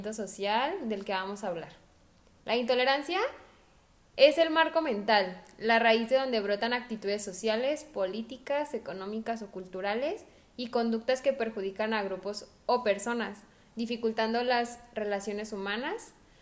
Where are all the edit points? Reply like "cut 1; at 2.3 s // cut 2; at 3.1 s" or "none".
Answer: none